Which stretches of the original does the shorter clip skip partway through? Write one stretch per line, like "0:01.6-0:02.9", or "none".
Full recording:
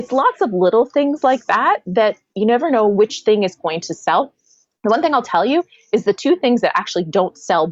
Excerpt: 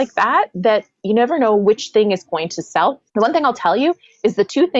0:04.4-0:04.8